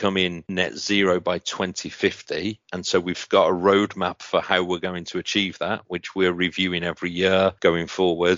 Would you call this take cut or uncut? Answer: uncut